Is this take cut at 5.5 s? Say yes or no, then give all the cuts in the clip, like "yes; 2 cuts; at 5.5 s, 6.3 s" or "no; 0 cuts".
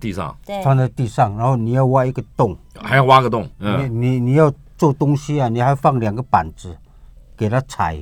no; 1 cut; at 3.5 s